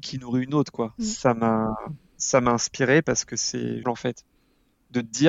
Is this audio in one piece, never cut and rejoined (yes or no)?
no